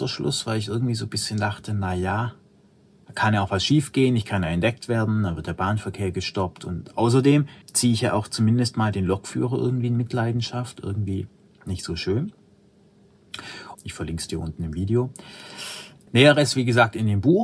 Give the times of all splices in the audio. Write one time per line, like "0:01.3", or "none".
0:07.6
0:13.8
0:16.1

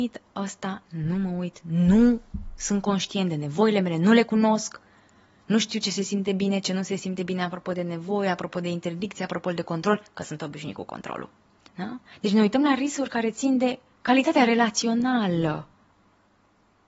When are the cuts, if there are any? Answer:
0:11.7

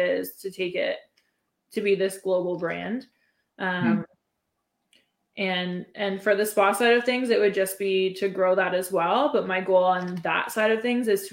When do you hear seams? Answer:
none

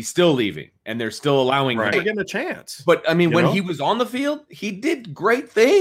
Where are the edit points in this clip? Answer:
0:01.9

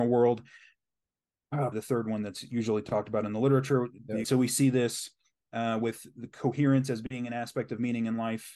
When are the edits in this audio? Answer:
0:01.7
0:04.2

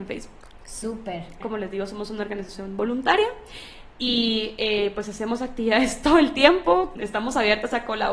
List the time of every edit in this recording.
0:01.4
0:07.0

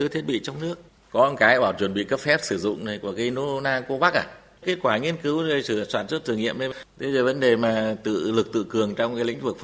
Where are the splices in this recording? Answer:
none

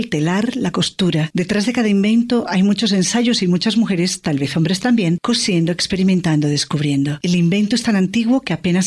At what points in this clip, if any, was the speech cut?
none

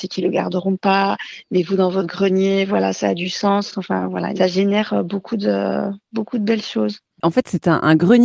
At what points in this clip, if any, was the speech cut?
none

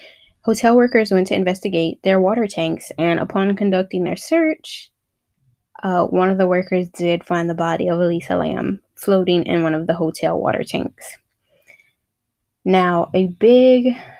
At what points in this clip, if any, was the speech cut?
none

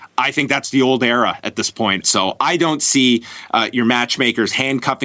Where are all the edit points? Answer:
0:02.0

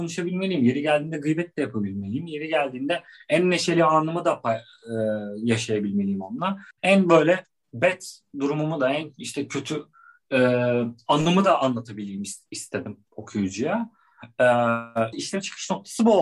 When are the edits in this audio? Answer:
0:06.7
0:15.1

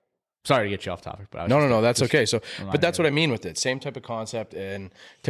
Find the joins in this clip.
none

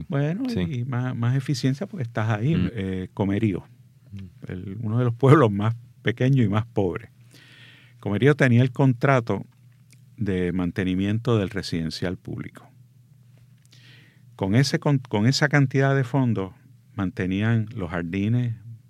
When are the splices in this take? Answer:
0:02.7

